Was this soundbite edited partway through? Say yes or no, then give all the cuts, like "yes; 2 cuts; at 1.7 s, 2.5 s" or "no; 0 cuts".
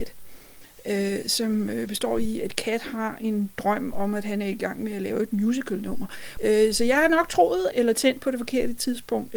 yes; 2 cuts; at 6.4 s, 7.7 s